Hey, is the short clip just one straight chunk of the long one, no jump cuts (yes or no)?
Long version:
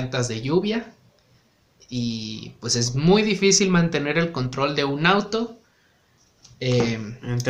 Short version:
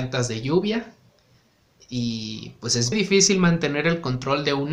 no